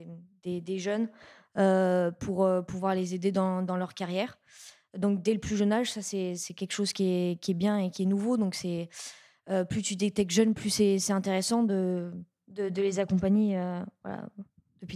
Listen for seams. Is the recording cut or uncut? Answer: uncut